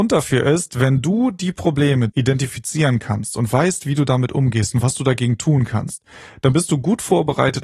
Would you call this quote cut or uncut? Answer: cut